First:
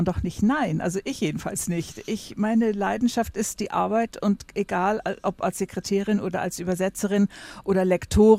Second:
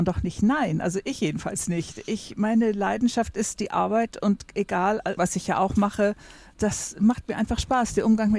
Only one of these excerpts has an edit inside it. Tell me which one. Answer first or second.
second